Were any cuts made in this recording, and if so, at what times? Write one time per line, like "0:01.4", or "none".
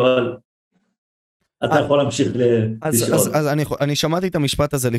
none